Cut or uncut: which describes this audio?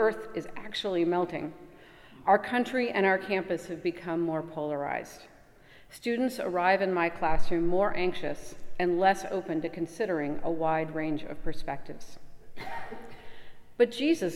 uncut